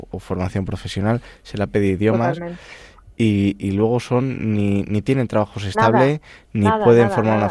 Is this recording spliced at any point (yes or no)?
no